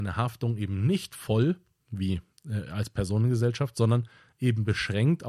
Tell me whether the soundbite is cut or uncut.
uncut